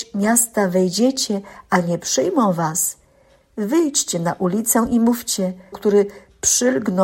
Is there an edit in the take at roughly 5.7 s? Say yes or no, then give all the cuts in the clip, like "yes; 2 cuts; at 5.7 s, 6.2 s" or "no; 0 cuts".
yes; 1 cut; at 5.7 s